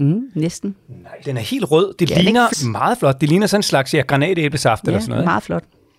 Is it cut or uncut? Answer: cut